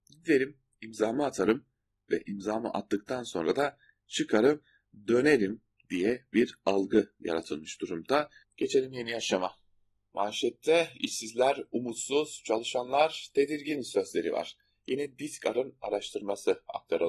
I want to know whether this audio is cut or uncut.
cut